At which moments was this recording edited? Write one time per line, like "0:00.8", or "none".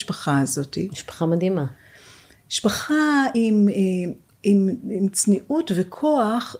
none